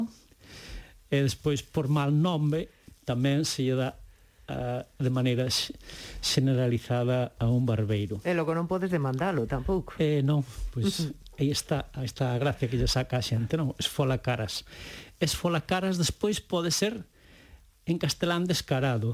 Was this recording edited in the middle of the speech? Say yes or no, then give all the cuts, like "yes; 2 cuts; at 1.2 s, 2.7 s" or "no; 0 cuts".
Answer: no; 0 cuts